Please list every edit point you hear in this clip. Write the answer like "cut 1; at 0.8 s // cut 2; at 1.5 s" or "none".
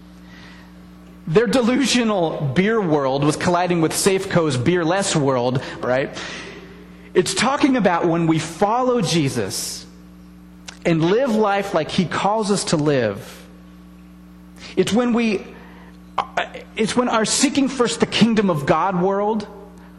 cut 1; at 5.8 s